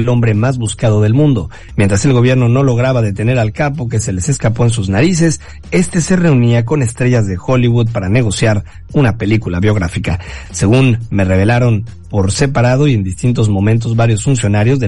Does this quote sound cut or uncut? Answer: cut